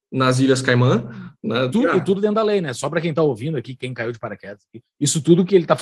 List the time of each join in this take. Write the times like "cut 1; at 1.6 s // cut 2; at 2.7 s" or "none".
cut 1; at 1.7 s